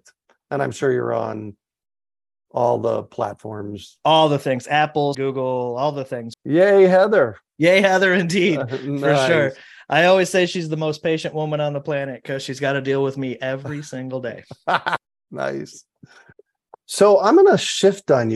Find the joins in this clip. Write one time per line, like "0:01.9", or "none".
0:05.1
0:06.3

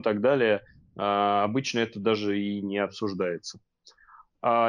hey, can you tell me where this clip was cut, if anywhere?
none

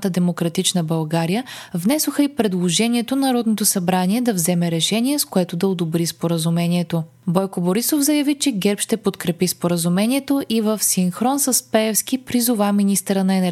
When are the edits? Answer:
none

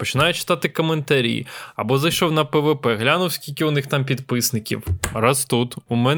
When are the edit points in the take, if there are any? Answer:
none

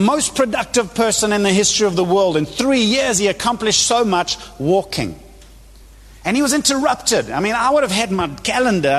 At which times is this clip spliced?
none

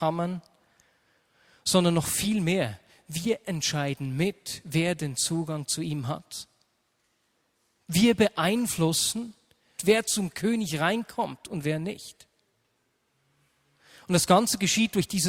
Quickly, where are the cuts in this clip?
0:09.8

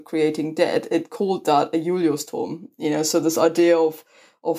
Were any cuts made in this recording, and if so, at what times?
none

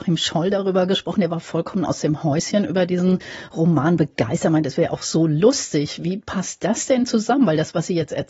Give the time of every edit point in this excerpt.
none

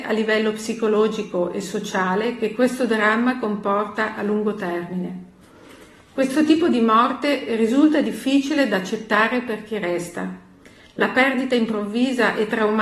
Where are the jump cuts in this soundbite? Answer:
none

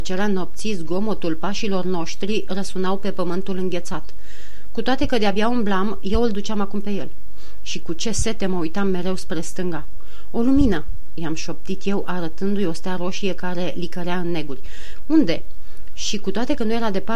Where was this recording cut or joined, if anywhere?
none

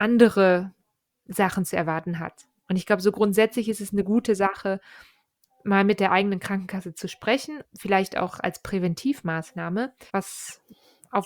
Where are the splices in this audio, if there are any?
0:07.6
0:10.1

